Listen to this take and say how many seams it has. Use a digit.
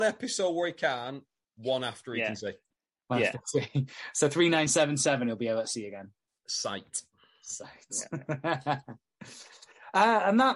0